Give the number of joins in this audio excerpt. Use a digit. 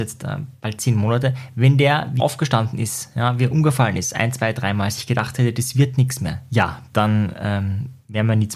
2